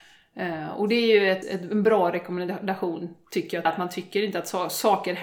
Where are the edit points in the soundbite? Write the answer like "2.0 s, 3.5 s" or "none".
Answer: 1.4 s, 3.7 s